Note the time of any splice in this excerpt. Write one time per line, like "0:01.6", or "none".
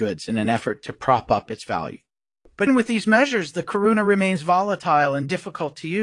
0:02.7